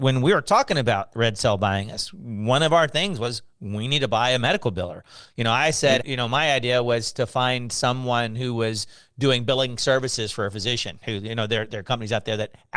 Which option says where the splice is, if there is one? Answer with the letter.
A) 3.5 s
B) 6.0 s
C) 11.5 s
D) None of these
B